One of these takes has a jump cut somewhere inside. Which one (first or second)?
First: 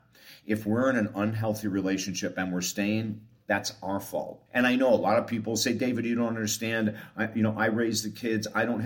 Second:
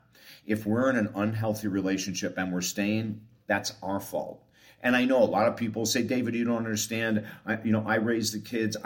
first